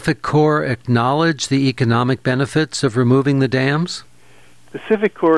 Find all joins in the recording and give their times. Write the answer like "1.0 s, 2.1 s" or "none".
none